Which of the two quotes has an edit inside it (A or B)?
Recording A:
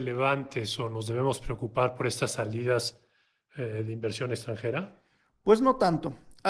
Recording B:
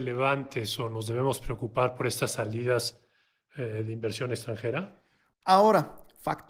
B